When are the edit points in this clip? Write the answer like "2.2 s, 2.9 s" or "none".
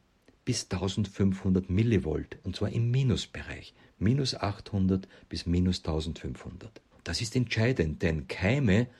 6.9 s